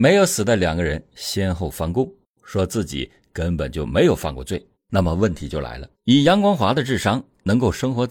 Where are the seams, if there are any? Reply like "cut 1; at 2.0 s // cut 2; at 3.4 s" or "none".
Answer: cut 1; at 4.7 s // cut 2; at 5.9 s